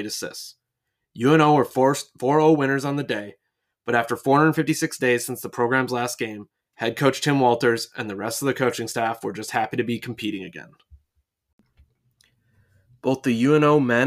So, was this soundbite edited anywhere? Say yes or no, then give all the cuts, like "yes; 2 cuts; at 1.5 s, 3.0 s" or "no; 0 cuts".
yes; 1 cut; at 6.6 s